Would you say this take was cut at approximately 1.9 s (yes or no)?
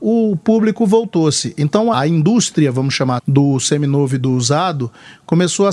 yes